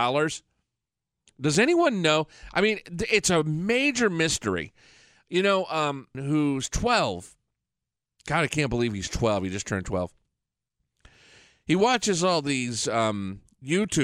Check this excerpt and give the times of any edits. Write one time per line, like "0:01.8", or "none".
0:06.1